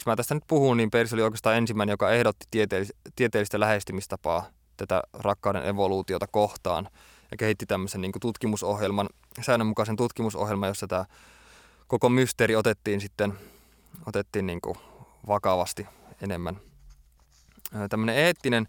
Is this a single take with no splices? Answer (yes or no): yes